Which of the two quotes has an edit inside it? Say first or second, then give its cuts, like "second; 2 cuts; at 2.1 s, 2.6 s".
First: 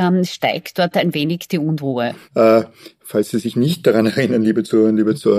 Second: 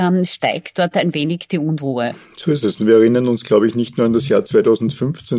first; 1 cut; at 2.2 s